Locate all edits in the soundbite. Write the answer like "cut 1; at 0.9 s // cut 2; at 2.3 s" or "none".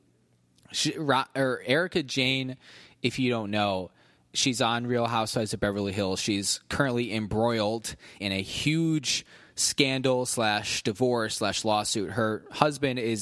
cut 1; at 8.2 s

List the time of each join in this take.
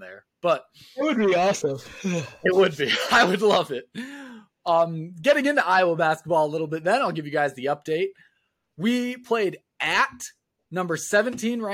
none

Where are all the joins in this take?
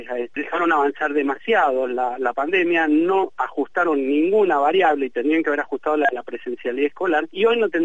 none

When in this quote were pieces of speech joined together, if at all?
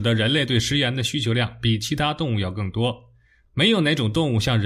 none

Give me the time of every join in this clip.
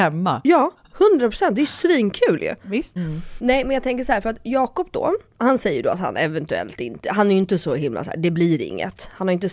cut 1; at 3.0 s

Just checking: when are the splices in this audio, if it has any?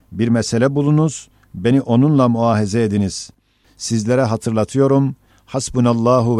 cut 1; at 3.6 s // cut 2; at 5.3 s

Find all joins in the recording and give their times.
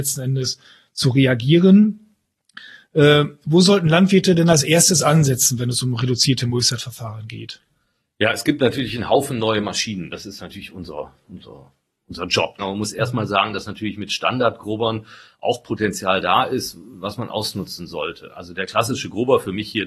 cut 1; at 12.6 s

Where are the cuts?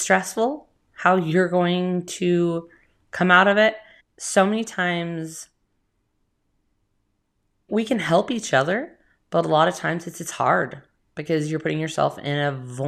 cut 1; at 4.0 s // cut 2; at 7.7 s

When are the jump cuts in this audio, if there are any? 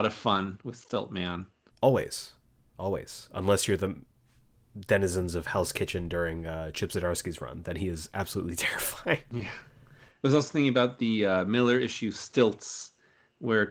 cut 1; at 1.7 s

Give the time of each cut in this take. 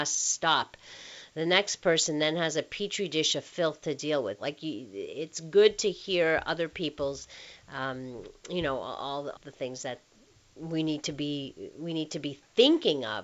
cut 1; at 4.4 s // cut 2; at 9.4 s

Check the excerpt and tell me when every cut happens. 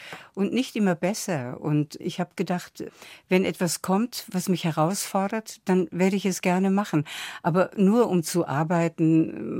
none

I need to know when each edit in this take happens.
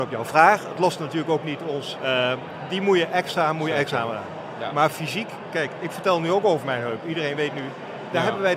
cut 1; at 2.0 s

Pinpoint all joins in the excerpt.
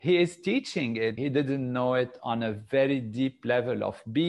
cut 1; at 1.2 s

